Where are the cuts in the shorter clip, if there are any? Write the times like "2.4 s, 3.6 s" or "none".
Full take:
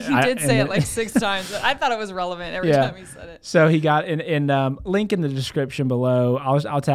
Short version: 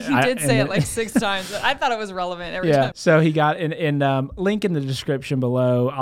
2.9 s